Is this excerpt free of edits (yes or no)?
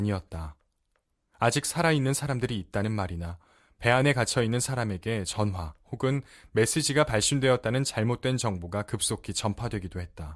yes